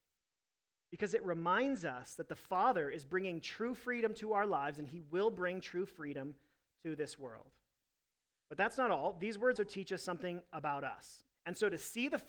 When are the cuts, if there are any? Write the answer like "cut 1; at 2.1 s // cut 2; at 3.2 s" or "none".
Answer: cut 1; at 9.6 s // cut 2; at 11.3 s